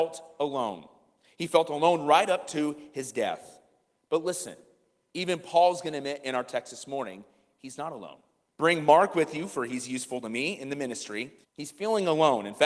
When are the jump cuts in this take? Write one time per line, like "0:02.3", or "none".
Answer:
0:08.5
0:11.4